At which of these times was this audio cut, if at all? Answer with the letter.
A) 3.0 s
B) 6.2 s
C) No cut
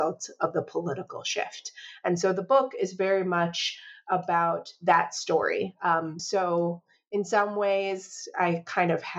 C